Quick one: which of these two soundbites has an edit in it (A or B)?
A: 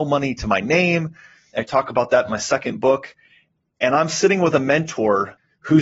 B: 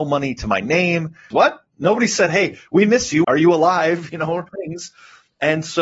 B